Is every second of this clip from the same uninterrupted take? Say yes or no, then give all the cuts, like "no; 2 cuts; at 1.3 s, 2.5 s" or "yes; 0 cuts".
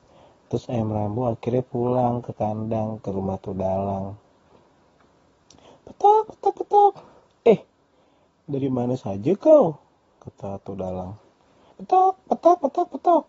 no; 1 cut; at 11.7 s